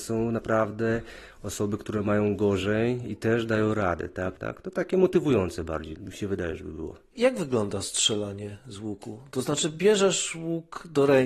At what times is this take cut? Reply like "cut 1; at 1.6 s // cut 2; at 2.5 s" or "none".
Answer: cut 1; at 4.4 s